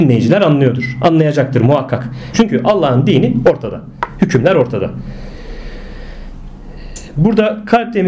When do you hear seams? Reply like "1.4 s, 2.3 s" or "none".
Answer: 2.3 s